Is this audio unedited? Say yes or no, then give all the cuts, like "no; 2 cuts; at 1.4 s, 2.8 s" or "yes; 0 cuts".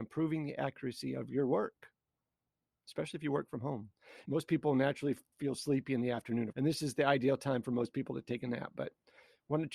no; 2 cuts; at 4.2 s, 6.5 s